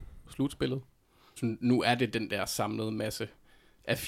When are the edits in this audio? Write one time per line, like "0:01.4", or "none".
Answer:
0:01.4

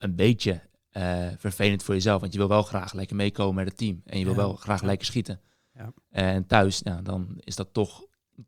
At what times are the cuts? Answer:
none

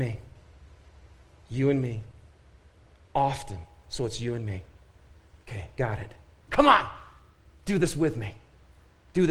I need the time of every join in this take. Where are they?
0:03.8
0:06.5

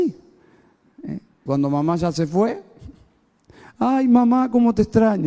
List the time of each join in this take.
0:01.5

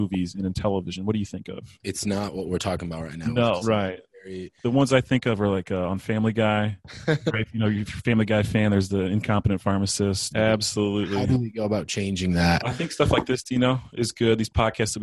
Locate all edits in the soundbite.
0:03.6
0:10.3

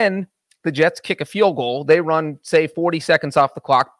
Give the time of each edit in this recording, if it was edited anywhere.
none

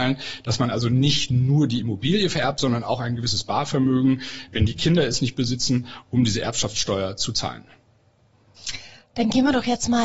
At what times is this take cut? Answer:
none

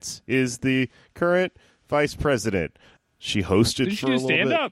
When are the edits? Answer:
0:03.0

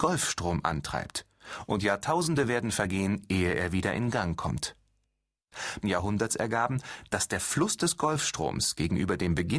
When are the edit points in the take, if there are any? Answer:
0:05.8

